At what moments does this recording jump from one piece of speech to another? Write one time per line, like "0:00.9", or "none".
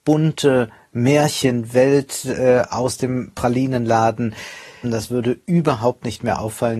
0:04.8

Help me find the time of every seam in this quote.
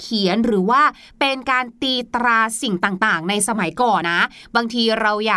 0:04.0

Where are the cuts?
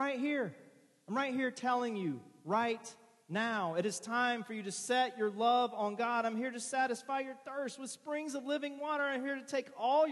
none

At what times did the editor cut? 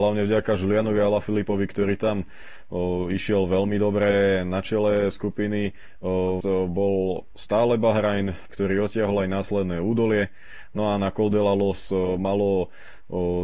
0:06.4
0:08.5

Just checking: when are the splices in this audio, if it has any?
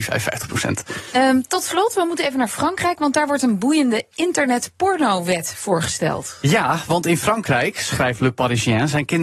none

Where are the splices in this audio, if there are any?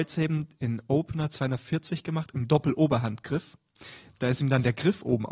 none

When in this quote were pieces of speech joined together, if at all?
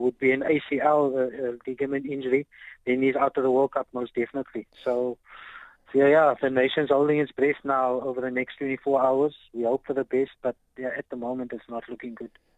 none

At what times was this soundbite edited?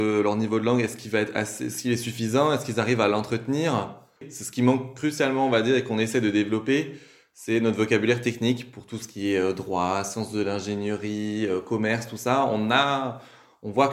none

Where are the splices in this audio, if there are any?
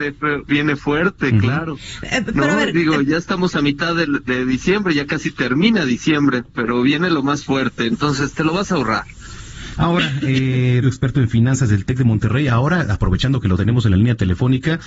0:07.9
0:09.7
0:10.8

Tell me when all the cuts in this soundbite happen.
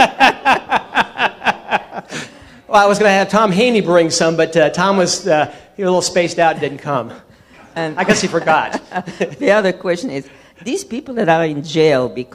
none

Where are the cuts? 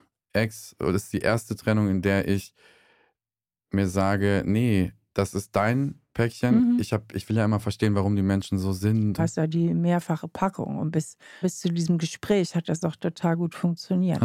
0:09.2
0:11.4

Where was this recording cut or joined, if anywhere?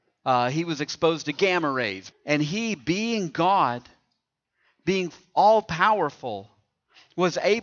0:02.1

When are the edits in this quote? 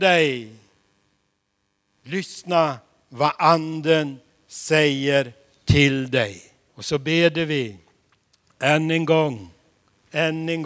0:06.7

